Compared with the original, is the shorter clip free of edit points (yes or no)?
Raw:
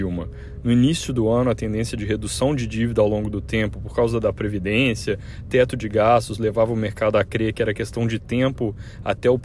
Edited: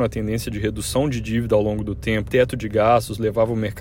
no